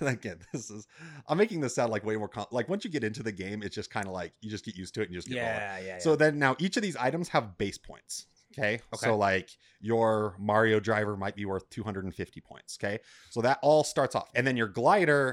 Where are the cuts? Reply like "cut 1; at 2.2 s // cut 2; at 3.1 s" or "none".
cut 1; at 14.3 s